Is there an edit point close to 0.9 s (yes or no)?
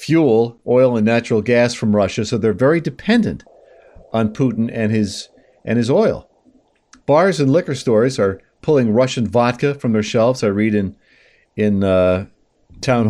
no